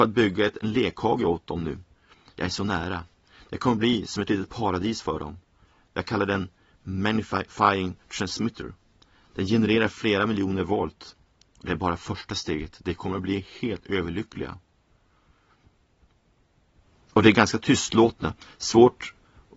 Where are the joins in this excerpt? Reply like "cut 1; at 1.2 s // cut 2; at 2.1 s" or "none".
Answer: none